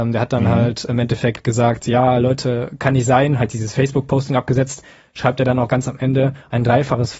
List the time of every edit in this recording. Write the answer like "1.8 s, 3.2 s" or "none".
none